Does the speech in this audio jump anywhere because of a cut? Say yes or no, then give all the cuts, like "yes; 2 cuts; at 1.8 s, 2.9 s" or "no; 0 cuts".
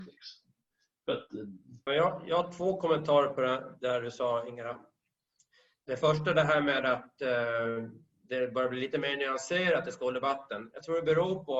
yes; 1 cut; at 1.9 s